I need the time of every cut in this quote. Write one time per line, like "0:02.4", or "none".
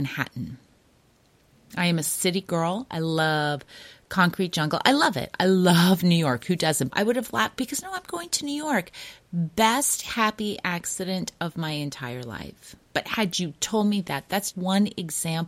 0:06.9
0:12.8
0:14.5